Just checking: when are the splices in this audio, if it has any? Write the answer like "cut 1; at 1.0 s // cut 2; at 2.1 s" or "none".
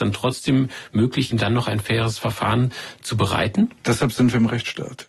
cut 1; at 1.3 s